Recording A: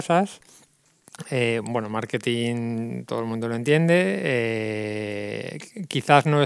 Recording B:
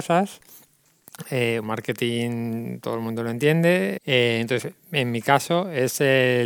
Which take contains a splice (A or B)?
B